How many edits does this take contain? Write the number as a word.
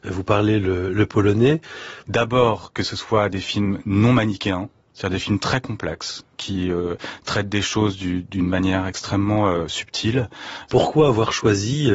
two